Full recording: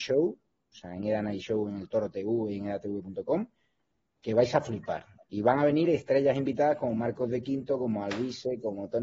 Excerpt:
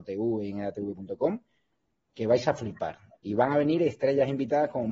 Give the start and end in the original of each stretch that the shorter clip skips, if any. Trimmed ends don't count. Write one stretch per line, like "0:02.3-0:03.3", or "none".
none